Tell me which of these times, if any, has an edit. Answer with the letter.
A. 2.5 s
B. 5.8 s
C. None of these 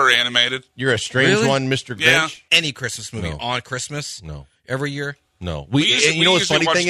A